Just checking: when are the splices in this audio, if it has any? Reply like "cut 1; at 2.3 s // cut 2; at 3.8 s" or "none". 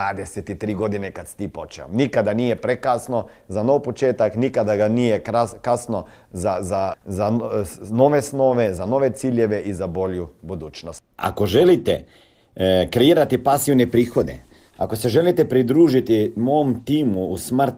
cut 1; at 6.9 s // cut 2; at 11.2 s